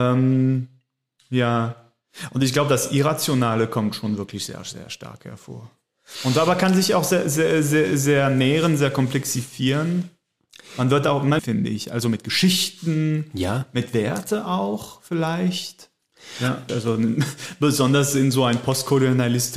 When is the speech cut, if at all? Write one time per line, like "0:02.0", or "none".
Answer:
0:11.4
0:16.7

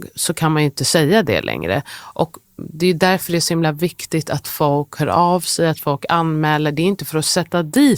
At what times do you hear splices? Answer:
none

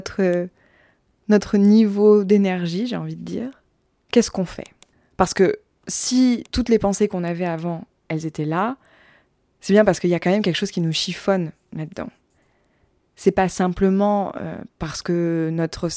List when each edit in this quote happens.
none

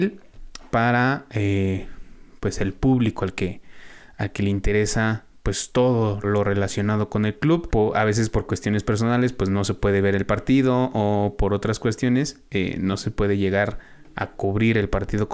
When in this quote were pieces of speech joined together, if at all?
0:06.2

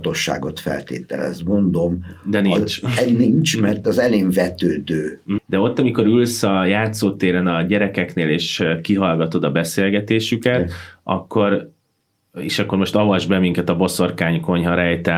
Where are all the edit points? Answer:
0:05.4

